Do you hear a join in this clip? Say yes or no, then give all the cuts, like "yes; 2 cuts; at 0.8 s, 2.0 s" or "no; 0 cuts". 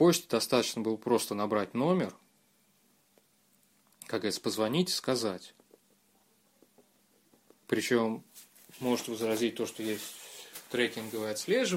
no; 0 cuts